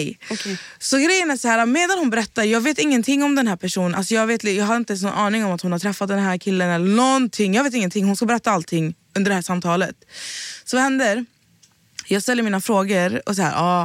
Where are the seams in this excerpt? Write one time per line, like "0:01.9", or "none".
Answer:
none